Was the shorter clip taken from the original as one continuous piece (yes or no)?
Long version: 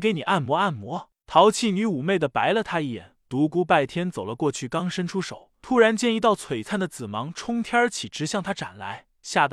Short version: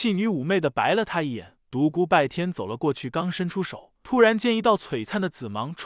yes